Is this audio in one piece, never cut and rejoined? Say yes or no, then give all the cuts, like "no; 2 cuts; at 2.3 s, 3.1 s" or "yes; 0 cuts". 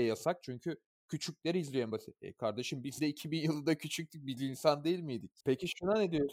yes; 0 cuts